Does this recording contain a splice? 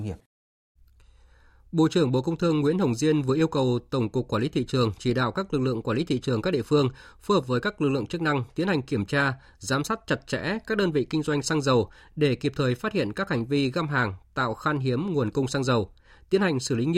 no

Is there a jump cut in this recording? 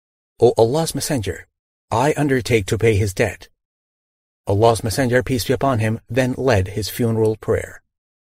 no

